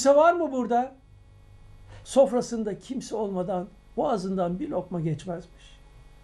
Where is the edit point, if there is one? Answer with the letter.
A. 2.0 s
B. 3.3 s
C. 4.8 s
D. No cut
A